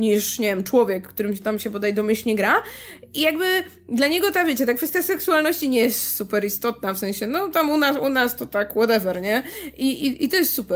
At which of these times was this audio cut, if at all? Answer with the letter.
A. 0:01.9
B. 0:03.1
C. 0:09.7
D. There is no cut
D